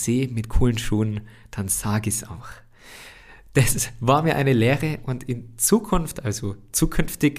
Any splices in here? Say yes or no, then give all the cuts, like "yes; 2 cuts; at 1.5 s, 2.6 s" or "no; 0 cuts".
no; 0 cuts